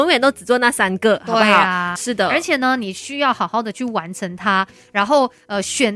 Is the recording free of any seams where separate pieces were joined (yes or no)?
no